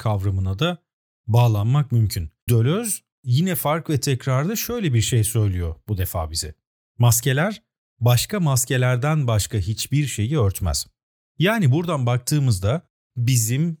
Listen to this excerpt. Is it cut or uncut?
cut